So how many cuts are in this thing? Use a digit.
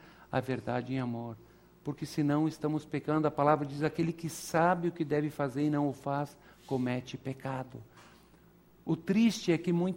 0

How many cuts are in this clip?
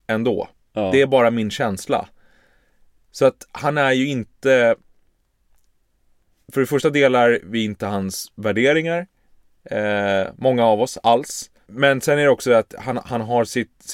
0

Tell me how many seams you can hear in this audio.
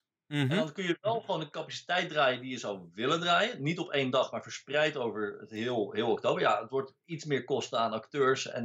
0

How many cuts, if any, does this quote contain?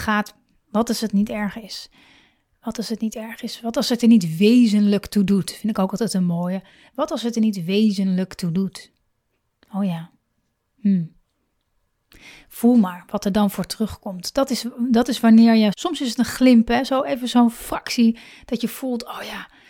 1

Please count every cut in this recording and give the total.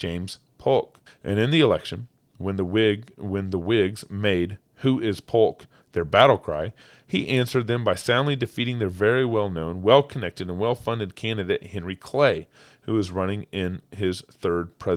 1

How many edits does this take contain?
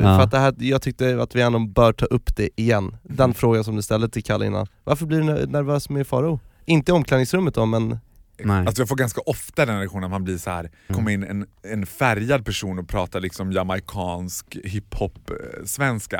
2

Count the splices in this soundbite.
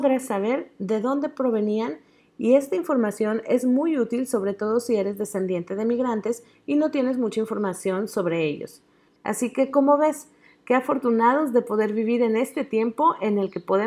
1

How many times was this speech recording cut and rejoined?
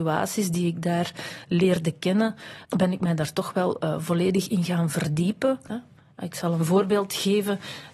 2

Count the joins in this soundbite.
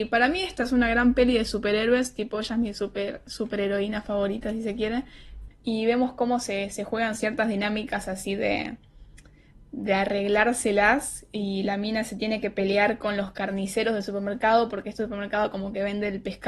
1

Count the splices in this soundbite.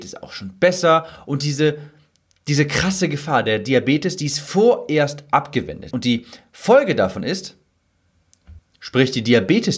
2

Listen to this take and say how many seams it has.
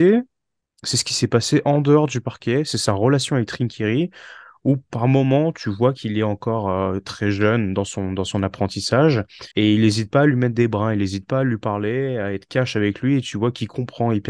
1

